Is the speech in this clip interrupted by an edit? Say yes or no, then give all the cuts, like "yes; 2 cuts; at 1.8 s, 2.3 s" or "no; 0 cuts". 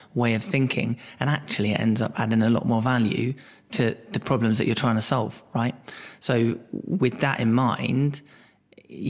no; 0 cuts